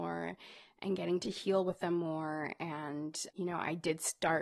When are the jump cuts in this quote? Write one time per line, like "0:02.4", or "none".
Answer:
none